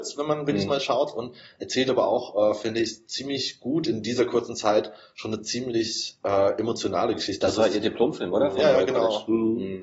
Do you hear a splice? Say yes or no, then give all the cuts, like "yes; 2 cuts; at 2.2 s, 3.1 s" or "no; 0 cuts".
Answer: no; 0 cuts